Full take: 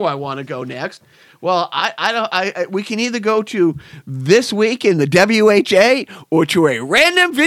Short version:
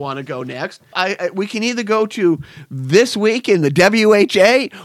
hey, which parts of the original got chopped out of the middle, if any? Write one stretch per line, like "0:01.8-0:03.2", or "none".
0:01.1-0:02.3